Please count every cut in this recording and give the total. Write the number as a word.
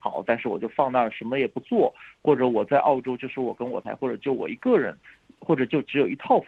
one